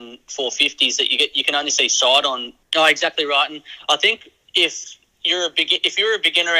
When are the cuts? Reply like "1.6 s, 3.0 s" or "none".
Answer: 2.6 s